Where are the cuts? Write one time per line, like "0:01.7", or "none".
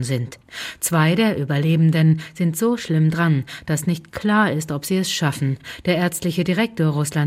none